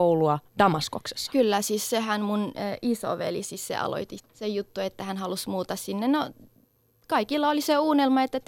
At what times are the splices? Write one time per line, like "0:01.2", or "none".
0:04.2